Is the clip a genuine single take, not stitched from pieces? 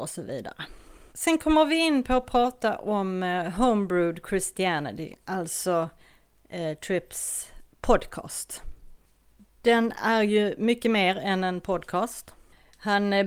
no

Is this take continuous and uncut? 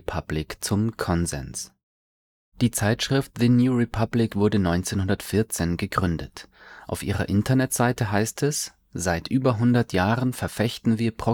yes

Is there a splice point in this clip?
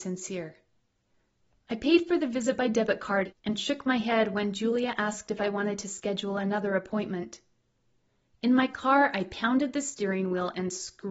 no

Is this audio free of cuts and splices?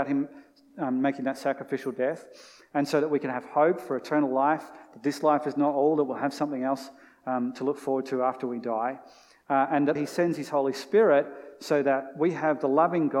no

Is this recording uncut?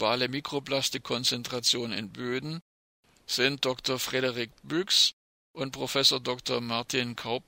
no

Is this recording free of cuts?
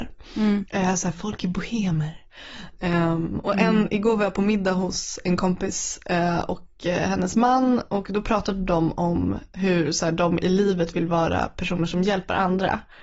yes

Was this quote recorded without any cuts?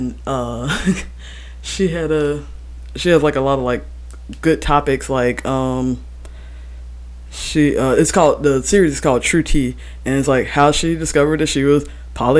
yes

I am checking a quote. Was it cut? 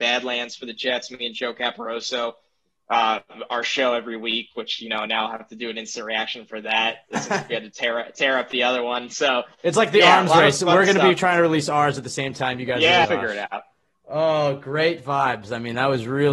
yes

